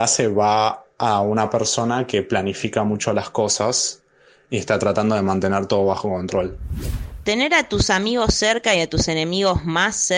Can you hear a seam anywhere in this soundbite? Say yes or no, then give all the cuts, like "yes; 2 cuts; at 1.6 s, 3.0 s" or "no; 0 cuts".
no; 0 cuts